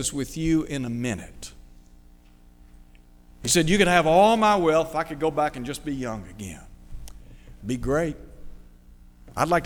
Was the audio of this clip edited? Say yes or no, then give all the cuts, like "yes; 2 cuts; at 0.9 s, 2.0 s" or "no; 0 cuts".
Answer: yes; 1 cut; at 7.6 s